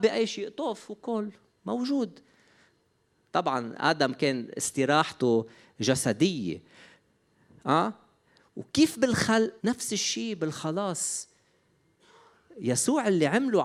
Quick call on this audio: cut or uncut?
cut